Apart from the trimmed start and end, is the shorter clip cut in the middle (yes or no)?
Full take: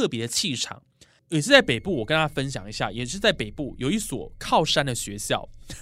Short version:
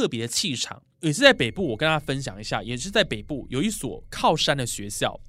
yes